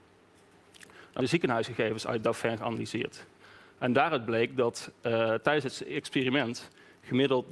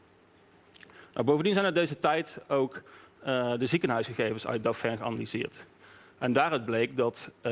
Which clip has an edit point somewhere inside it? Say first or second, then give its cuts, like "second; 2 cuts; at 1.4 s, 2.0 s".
first; 1 cut; at 1.2 s